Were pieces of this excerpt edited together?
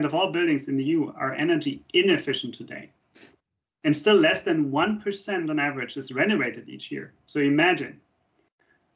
no; 0 cuts

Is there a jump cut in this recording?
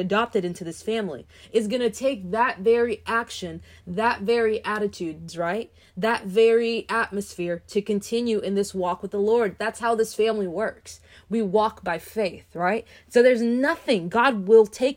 yes; 1 cut; at 5.3 s

